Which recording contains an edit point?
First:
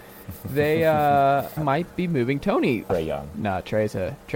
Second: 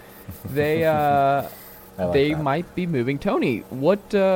first; 2 cuts; at 1.6 s, 2.9 s

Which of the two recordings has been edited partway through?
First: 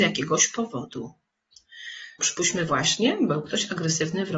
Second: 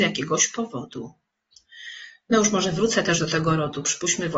first; 1 cut; at 2.2 s

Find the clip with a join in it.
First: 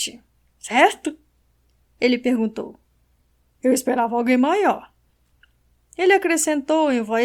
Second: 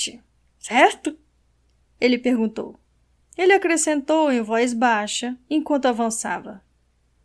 second; 1 cut; at 3.2 s

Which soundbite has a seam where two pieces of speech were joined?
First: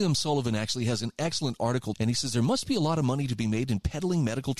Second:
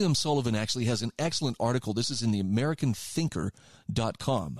first; 1 cut; at 1.9 s

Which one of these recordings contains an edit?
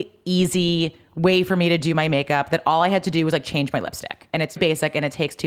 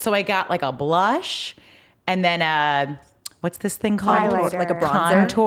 first; 1 cut; at 4.6 s

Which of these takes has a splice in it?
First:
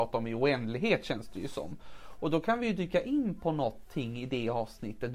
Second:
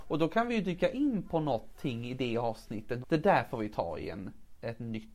second; 1 cut; at 3.0 s

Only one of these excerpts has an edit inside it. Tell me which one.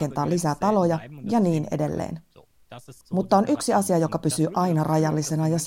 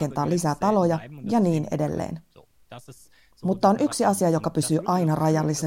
first; 1 cut; at 3.0 s

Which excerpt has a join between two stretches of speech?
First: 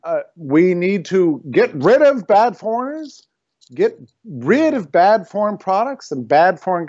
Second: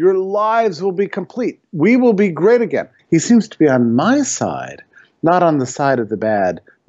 second; 1 cut; at 3.0 s

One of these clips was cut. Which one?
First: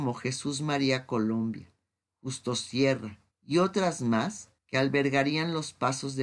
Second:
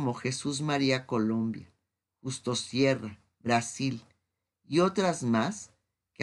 first; 2 cuts; at 3.3 s, 4.6 s

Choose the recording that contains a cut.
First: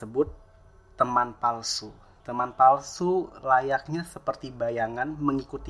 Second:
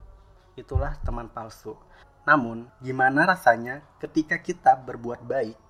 second; 1 cut; at 2.0 s

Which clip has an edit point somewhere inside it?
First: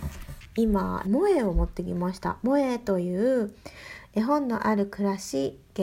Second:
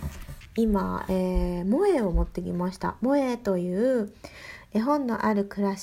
first; 1 cut; at 1.0 s

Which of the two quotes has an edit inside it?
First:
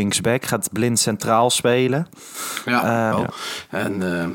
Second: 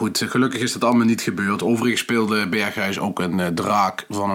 first; 1 cut; at 3.1 s

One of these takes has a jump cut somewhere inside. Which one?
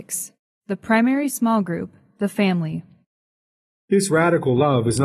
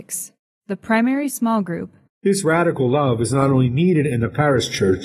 second; 1 cut; at 2.1 s

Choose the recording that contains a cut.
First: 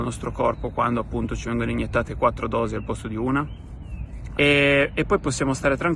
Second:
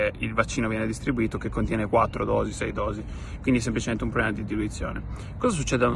first; 1 cut; at 4.4 s

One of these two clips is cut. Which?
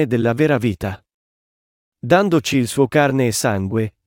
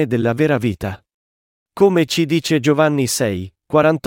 second; 1 cut; at 1.6 s

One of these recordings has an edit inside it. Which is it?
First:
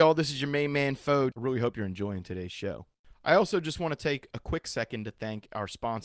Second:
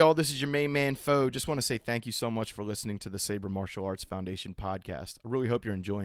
first; 1 cut; at 1.3 s

